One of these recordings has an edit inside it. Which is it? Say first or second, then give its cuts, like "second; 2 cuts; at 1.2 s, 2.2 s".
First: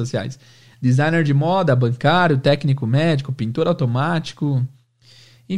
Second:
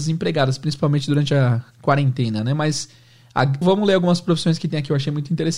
second; 1 cut; at 3.6 s